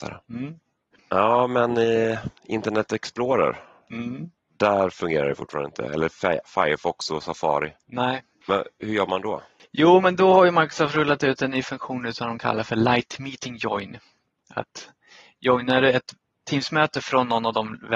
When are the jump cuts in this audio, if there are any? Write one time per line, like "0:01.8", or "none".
none